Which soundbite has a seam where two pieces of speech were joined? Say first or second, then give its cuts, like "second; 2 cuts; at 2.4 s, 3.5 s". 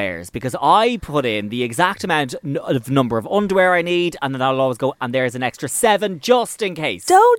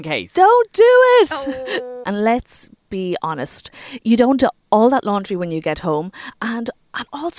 second; 1 cut; at 2.0 s